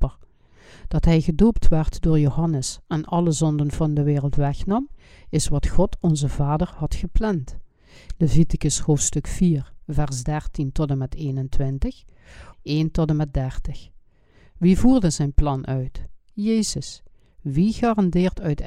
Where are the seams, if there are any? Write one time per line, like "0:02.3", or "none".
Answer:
0:12.5

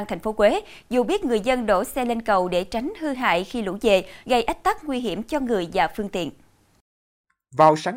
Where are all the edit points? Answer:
0:04.2

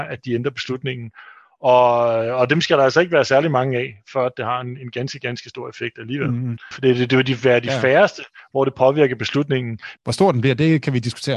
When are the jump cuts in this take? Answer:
0:06.7
0:10.0

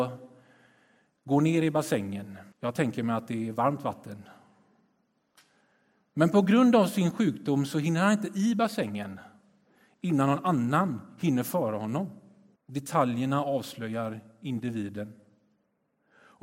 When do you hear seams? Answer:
0:02.5
0:12.6

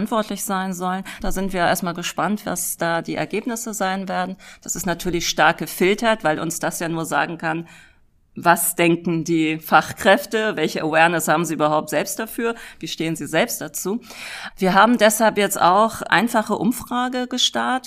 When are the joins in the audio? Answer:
0:01.2
0:14.5
0:16.1

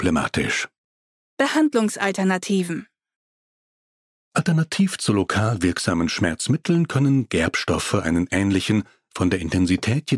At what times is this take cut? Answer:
0:01.2

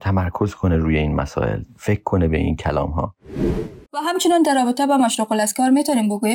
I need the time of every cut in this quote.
0:03.9

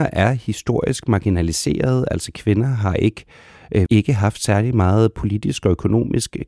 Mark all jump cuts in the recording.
0:03.9

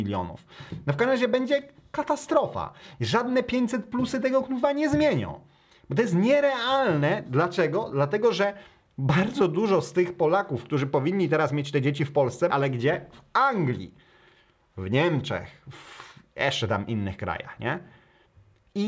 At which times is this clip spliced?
0:12.5

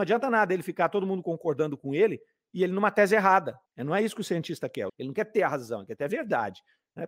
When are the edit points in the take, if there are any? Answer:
0:03.7
0:04.9

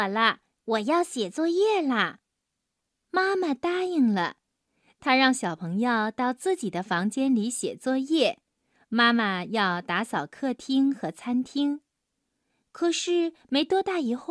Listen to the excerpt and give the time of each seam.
none

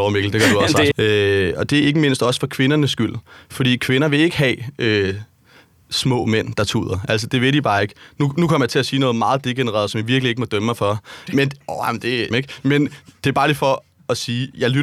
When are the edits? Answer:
0:00.9
0:11.3
0:12.3

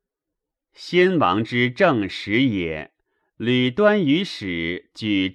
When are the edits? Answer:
none

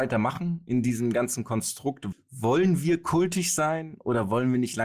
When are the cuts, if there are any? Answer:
0:02.1

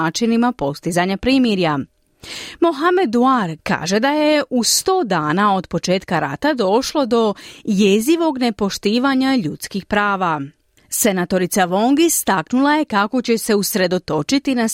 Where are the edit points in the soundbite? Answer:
0:03.6

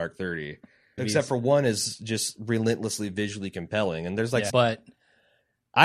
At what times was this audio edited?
0:01.0
0:04.5

